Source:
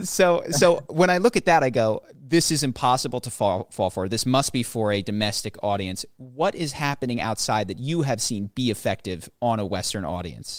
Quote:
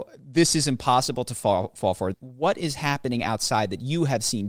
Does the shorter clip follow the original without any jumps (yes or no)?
no